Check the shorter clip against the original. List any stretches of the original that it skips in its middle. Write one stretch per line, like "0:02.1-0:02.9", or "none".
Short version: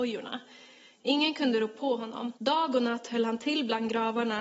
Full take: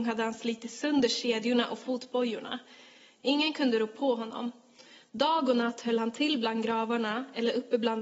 0:04.6-0:05.1